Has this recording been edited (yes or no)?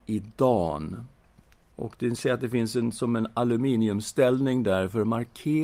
yes